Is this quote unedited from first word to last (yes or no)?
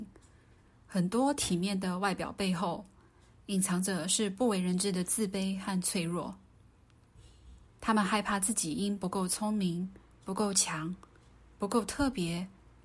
yes